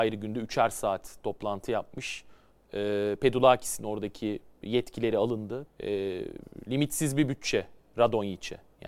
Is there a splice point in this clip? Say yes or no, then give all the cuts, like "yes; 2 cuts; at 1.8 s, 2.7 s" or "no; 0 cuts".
yes; 1 cut; at 5.7 s